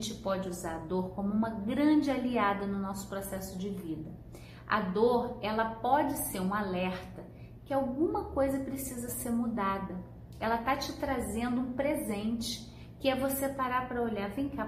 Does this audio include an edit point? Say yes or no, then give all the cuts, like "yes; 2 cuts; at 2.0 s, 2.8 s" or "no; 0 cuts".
no; 0 cuts